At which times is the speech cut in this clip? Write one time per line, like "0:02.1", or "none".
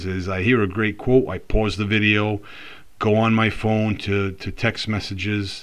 none